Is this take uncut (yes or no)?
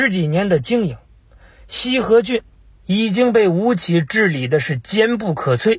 yes